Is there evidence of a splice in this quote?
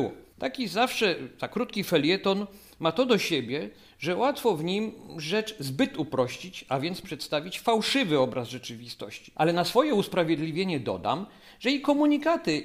no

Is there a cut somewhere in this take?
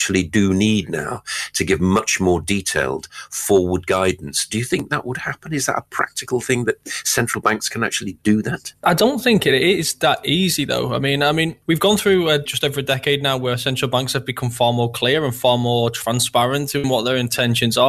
no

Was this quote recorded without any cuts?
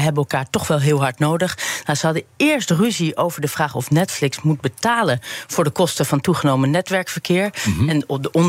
yes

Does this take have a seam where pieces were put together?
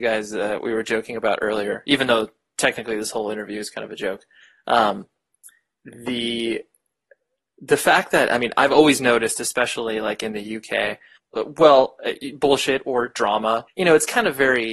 yes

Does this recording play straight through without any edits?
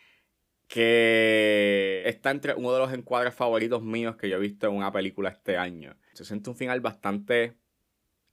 no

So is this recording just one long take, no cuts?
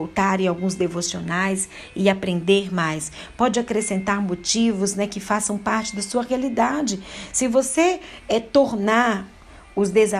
yes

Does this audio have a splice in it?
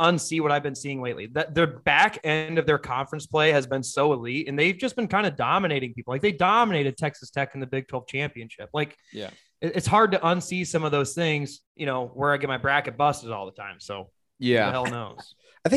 yes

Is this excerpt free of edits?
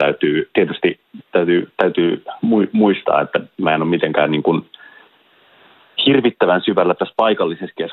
yes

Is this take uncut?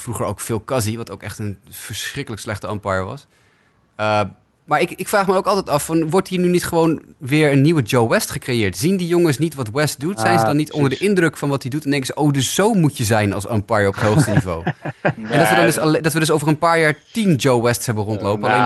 yes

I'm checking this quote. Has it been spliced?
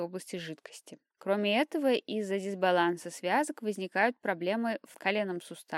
yes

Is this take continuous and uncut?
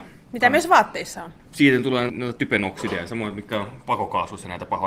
no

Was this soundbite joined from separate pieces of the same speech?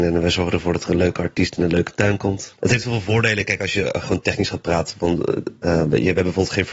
yes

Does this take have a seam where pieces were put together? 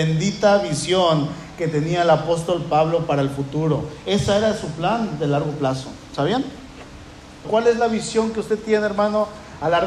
yes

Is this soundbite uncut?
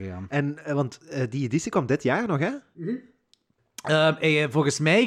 yes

